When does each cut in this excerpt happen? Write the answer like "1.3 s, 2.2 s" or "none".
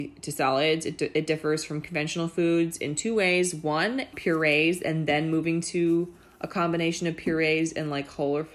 4.1 s

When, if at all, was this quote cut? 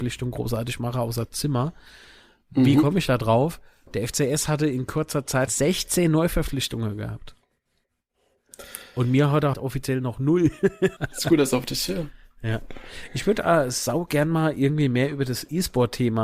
5.5 s, 9.5 s, 11.0 s

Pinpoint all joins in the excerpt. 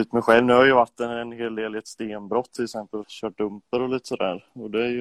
3.0 s

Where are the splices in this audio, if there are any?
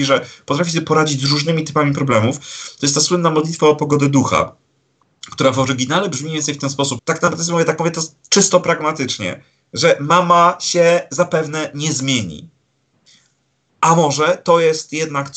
7.0 s

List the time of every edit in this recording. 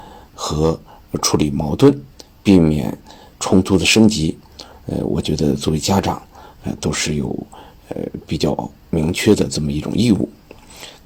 none

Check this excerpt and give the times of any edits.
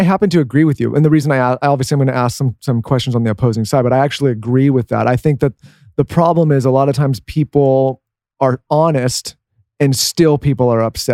none

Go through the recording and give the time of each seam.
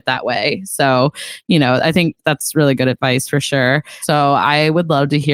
4.0 s

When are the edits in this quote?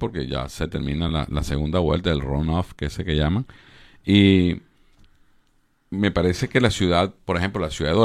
none

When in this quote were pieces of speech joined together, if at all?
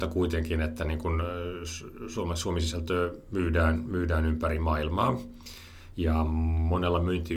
5.9 s

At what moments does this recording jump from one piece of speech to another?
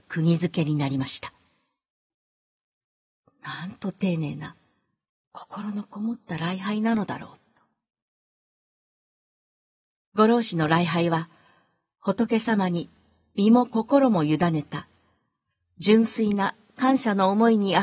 none

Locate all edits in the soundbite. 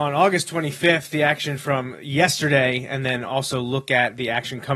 none

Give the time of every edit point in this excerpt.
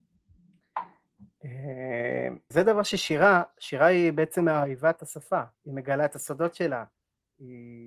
2.5 s, 5.5 s

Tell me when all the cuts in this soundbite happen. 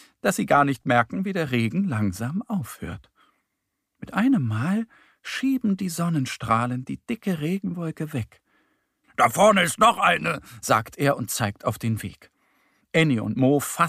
9.0 s

